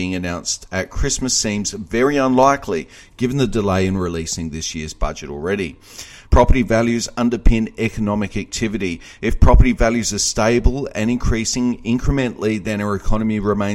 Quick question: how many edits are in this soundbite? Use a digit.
0